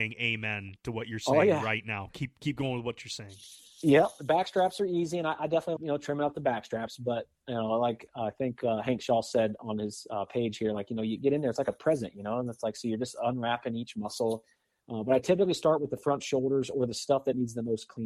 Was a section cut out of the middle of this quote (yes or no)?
yes